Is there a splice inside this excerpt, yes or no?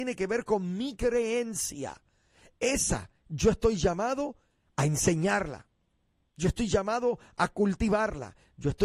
no